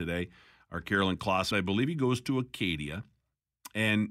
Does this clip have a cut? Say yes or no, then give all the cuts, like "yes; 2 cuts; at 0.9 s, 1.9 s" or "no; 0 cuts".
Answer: yes; 1 cut; at 1.5 s